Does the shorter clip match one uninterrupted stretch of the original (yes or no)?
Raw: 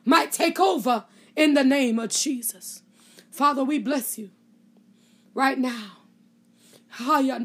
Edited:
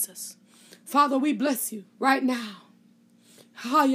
no